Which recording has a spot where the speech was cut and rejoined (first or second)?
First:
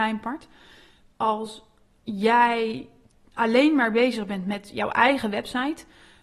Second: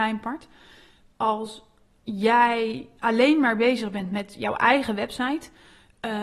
second